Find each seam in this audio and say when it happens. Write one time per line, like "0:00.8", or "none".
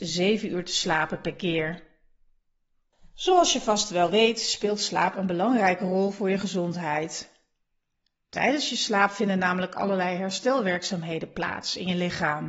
none